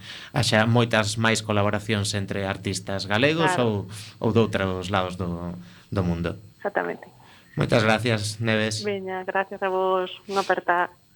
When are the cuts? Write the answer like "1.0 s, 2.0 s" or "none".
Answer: 6.5 s